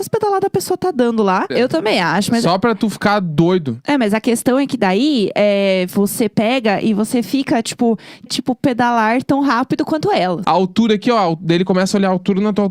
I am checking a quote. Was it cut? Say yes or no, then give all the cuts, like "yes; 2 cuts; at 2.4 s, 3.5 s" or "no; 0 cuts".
yes; 3 cuts; at 1.5 s, 8.3 s, 10.4 s